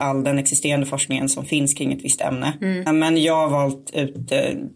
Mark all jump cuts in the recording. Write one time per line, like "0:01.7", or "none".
0:02.9